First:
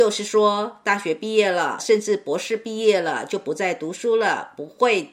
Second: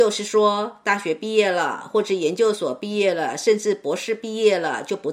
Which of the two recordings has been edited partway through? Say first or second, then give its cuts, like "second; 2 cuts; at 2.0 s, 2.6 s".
first; 1 cut; at 1.8 s